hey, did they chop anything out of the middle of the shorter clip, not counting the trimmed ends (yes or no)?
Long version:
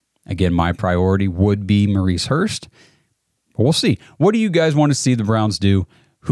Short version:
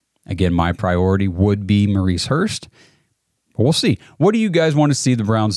no